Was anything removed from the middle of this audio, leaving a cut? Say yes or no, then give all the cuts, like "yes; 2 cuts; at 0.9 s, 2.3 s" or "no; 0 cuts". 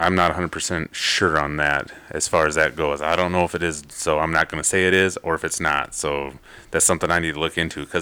no; 0 cuts